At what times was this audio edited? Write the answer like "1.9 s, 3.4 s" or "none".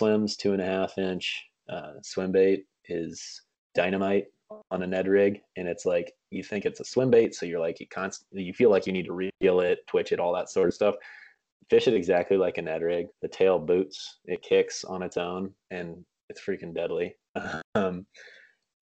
13.1 s